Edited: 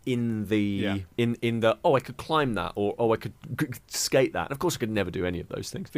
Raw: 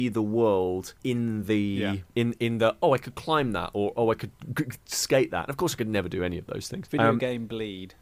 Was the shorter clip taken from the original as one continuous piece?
yes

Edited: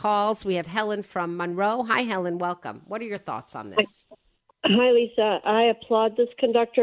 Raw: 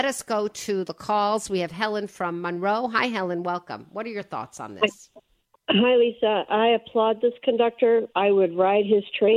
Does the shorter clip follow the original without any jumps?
yes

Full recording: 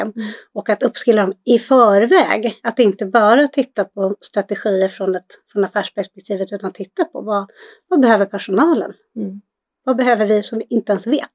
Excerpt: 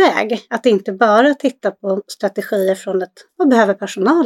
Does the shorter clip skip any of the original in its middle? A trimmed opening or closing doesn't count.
yes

